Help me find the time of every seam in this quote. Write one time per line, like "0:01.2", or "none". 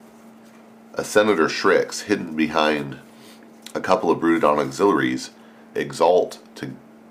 0:05.7

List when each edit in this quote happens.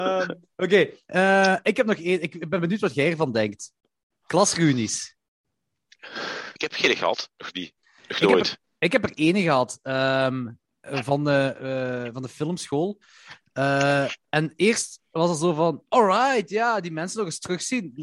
0:06.6

